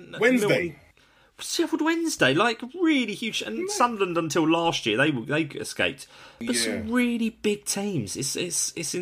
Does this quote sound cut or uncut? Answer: uncut